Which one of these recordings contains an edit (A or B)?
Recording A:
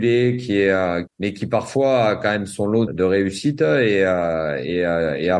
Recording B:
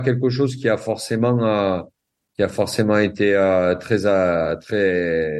A